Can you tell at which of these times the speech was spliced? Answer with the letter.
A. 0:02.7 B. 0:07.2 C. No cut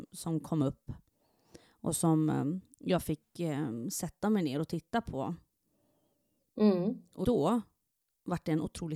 B